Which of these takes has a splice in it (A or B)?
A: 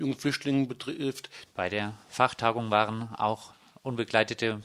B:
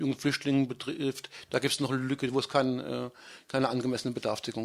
A